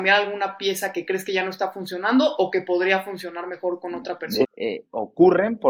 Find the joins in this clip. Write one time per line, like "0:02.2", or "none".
0:04.4